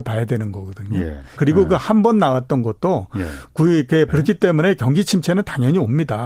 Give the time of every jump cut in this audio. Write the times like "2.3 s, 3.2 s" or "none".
1.4 s, 4.1 s

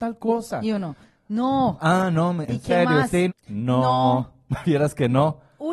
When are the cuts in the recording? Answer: 3.3 s

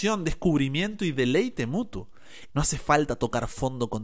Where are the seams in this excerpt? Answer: 2.5 s

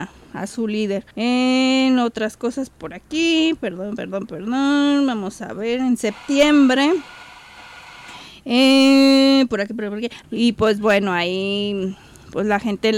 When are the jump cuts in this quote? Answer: 1.1 s, 10.2 s

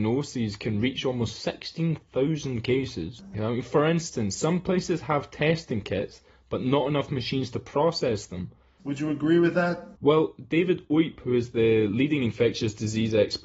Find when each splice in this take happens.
3.3 s, 8.8 s

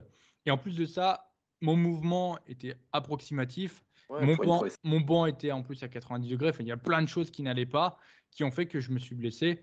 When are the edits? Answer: 4.6 s

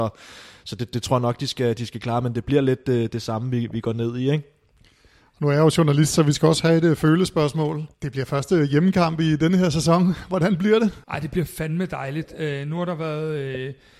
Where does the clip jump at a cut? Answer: 7.9 s, 11.0 s

